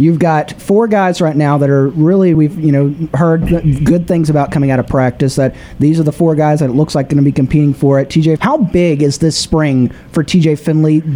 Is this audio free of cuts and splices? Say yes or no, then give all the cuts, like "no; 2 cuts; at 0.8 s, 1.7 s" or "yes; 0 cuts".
no; 2 cuts; at 2.3 s, 8.4 s